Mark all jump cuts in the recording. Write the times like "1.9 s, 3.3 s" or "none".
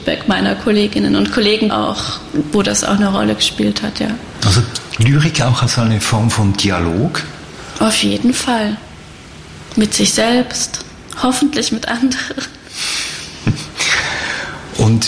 1.7 s